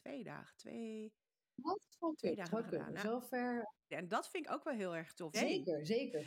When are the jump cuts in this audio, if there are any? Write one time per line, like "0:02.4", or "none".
0:03.9
0:05.3